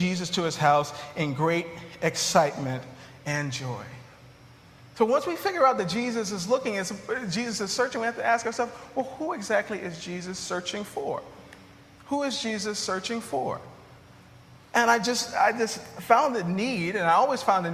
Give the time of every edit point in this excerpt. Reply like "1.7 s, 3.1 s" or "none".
none